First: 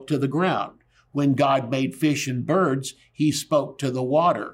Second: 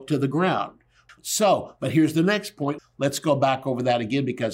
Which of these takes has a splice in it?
second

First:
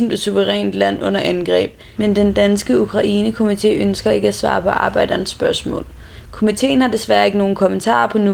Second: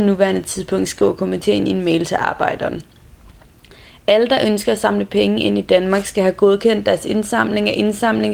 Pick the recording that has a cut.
first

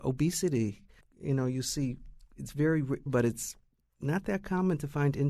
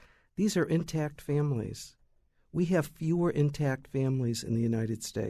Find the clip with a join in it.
first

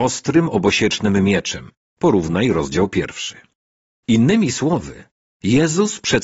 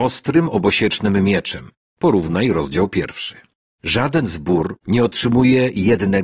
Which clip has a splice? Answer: second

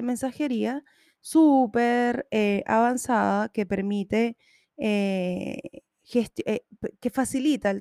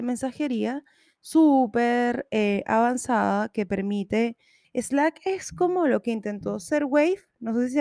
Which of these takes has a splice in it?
second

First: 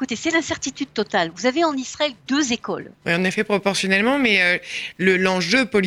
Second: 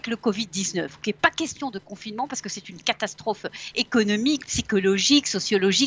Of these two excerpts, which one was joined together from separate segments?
first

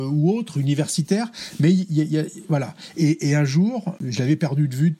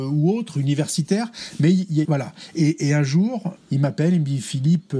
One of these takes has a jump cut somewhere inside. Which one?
second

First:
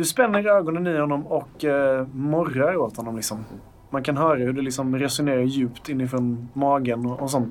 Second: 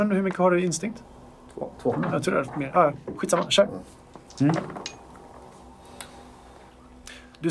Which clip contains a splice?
second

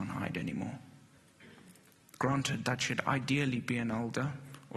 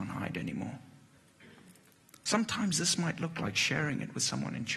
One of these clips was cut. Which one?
first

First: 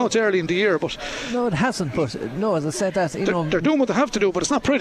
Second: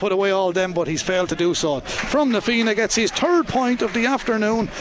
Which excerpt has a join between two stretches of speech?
second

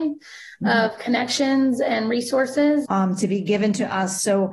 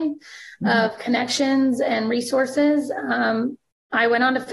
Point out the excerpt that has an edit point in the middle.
first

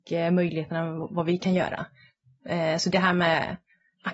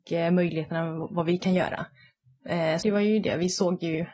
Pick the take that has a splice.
second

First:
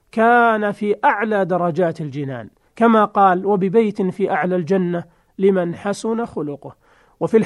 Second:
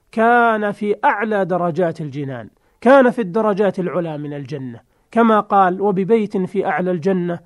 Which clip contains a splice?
first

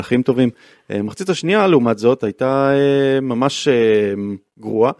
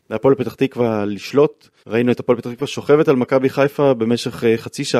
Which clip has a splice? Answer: second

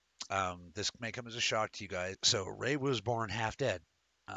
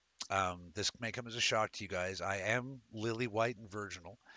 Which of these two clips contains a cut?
first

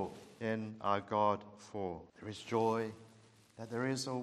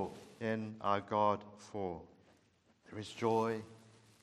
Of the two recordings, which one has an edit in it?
first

